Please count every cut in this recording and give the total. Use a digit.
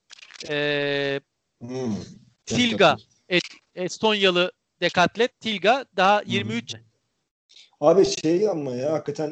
1